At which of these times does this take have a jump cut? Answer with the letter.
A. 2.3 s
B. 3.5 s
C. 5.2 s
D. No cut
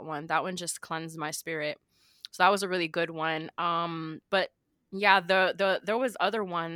D